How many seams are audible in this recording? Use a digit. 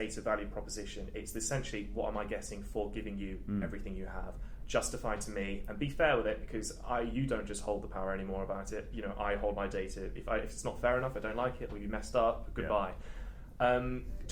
0